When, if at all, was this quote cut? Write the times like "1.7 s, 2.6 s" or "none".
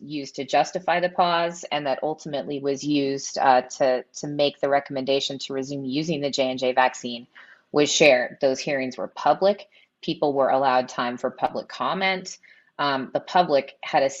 none